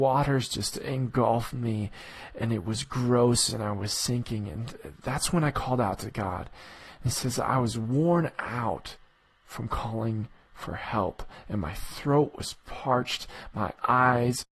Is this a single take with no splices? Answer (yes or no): yes